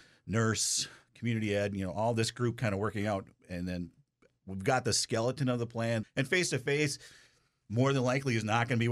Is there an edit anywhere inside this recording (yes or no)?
yes